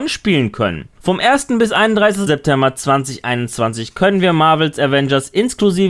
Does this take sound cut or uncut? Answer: cut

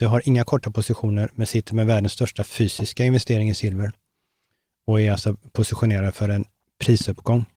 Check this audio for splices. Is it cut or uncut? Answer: uncut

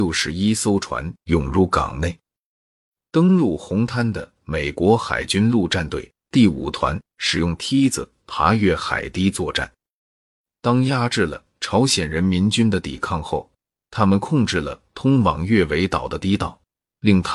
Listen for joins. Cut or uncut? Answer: uncut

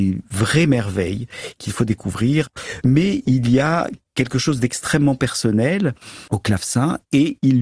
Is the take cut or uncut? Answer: cut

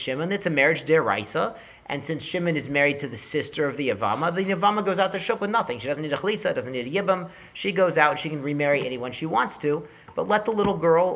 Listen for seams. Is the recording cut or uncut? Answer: uncut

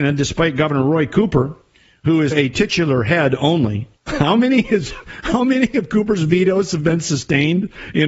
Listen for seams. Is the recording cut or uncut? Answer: cut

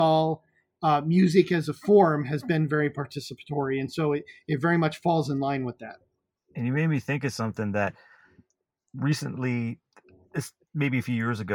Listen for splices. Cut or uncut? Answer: cut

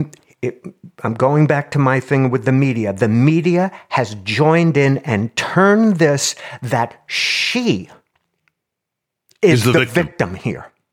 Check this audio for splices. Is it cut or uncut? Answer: uncut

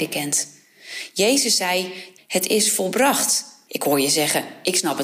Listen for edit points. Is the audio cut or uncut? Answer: cut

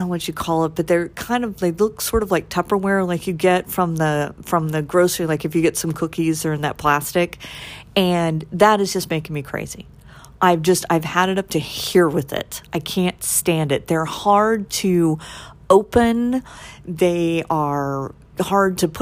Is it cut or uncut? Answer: uncut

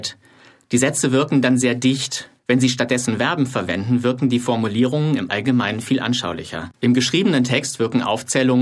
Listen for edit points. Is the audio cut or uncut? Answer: cut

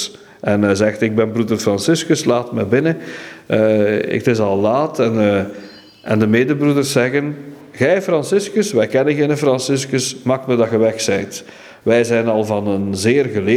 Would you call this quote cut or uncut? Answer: uncut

